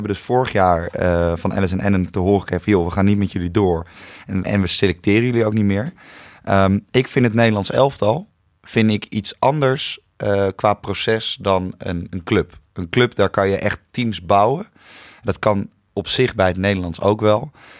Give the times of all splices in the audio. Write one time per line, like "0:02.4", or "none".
0:04.4